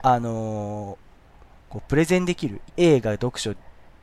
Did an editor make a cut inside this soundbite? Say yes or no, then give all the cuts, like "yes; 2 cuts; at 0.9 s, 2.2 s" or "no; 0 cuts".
yes; 1 cut; at 2.7 s